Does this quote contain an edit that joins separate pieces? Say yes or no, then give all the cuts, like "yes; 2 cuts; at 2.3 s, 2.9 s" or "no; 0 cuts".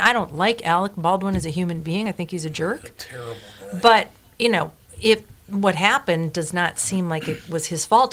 no; 0 cuts